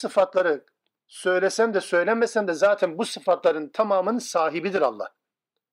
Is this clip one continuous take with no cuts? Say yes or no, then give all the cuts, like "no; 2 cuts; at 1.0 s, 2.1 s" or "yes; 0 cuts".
yes; 0 cuts